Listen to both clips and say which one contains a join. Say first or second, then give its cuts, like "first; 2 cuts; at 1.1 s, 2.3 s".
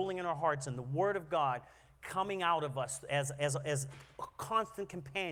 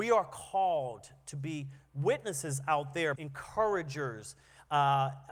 second; 1 cut; at 3.1 s